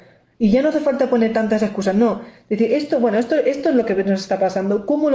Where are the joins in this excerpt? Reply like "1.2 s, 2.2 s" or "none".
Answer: none